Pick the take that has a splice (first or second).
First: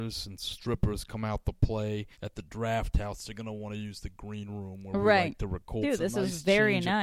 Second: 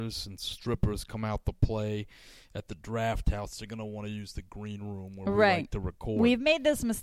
first